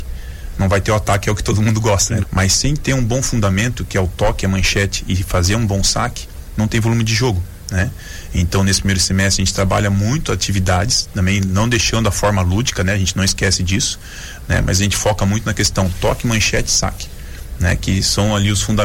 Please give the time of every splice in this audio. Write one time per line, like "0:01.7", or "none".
0:02.2